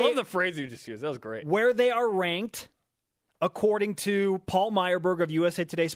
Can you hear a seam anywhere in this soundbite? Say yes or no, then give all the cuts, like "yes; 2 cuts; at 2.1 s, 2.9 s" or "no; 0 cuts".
no; 0 cuts